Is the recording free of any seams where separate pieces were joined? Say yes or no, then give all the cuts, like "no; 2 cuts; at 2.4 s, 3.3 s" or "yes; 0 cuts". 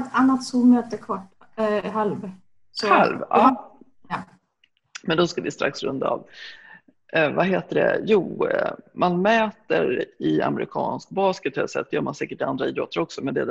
yes; 0 cuts